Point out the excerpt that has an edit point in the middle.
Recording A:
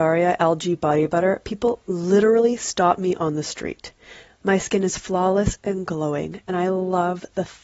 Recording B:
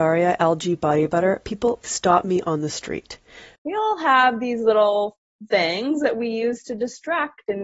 B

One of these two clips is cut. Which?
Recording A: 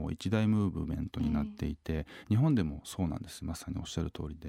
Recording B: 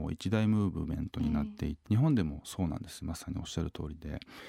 B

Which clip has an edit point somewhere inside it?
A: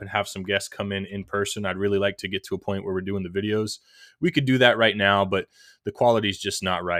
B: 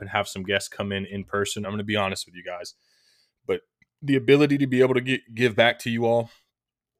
B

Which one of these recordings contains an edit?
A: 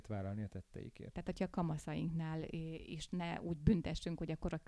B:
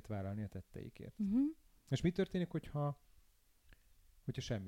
A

